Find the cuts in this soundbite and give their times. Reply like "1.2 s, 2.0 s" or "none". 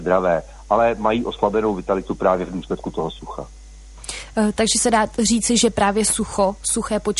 none